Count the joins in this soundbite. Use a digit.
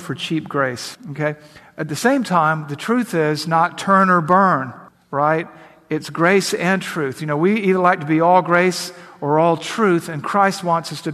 0